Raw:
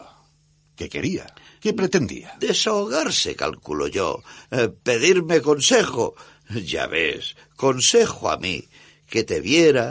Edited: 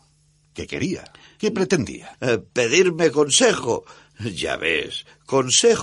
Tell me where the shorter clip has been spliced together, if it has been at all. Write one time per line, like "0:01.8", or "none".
0:02.1